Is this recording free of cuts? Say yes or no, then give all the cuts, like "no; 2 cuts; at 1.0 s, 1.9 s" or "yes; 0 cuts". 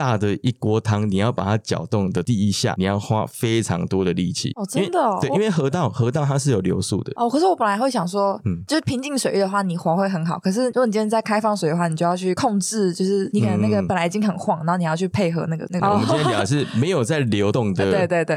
no; 1 cut; at 15.8 s